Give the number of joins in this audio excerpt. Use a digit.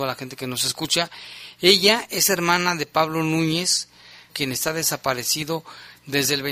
1